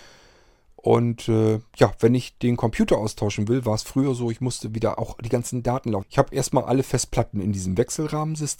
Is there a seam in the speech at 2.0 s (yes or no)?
no